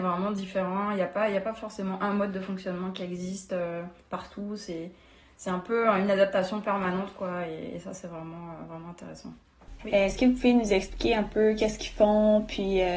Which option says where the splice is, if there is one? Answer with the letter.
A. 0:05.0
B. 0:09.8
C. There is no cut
B